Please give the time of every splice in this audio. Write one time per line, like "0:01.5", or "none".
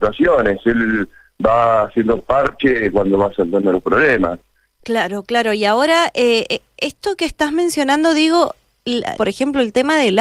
0:04.8
0:09.2